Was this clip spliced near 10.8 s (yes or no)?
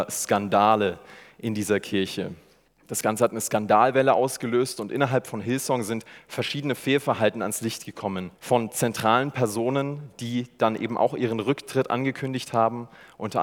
no